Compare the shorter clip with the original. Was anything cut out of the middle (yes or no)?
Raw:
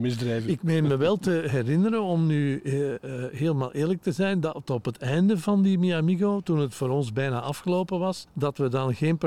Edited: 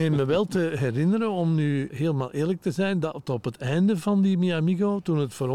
yes